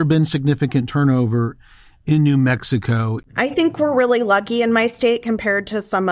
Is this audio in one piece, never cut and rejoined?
no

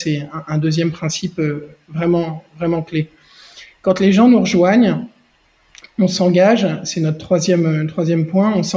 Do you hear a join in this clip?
no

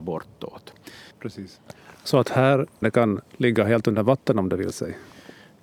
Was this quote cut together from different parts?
yes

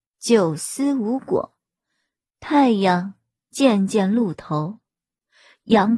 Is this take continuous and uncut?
yes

